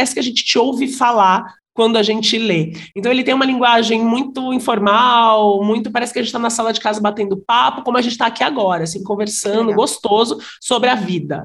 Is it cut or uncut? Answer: uncut